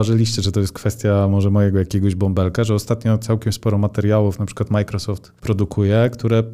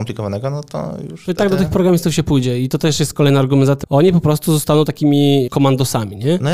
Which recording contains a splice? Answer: second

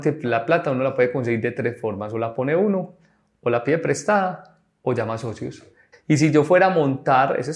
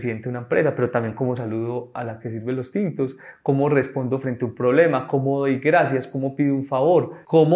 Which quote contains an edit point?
first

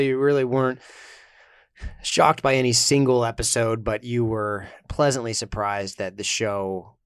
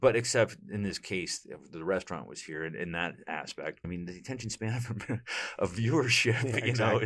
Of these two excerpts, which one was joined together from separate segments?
second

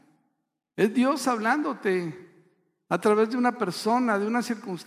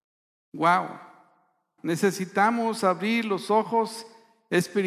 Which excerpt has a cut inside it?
second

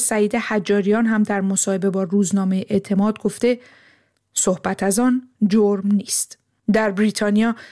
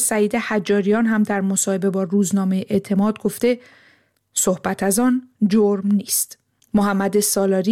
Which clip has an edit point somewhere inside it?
second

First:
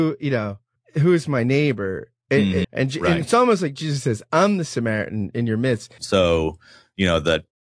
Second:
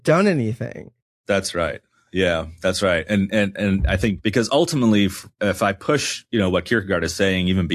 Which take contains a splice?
first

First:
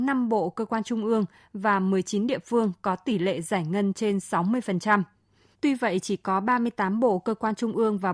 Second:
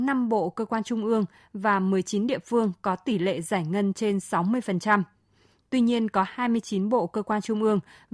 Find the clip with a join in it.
first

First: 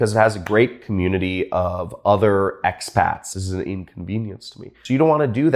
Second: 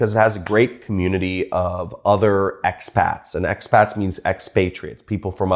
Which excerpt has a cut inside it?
first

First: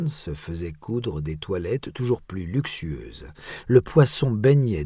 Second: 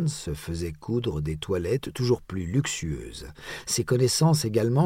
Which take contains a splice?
first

